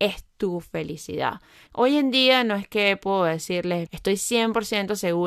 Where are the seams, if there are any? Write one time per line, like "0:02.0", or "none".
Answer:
0:01.7
0:03.9